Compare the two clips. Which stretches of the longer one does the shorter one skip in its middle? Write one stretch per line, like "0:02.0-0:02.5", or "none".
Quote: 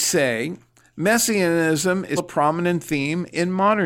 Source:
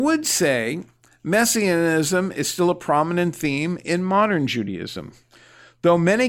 0:02.4-0:02.7